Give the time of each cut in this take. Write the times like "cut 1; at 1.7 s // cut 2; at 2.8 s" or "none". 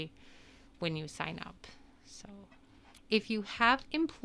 cut 1; at 3.0 s